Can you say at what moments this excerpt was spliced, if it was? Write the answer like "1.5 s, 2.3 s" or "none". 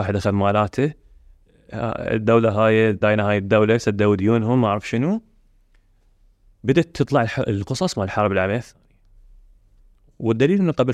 3.0 s